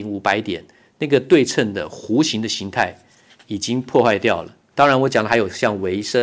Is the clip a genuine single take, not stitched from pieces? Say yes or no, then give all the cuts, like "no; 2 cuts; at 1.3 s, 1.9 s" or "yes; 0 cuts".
no; 1 cut; at 4.7 s